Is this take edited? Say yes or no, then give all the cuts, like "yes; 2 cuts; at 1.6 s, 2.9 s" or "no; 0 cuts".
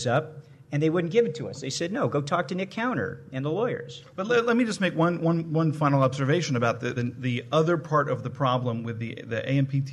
yes; 1 cut; at 7.0 s